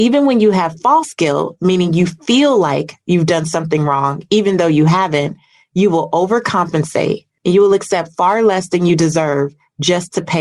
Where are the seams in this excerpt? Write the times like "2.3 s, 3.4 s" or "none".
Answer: 7.4 s